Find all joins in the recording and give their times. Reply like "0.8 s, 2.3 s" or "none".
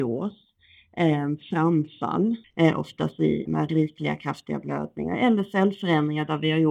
2.4 s, 3.5 s